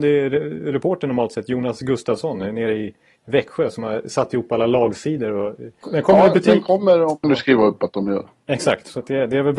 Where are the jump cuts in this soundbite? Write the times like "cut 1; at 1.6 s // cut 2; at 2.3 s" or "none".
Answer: cut 1; at 5.8 s // cut 2; at 7.2 s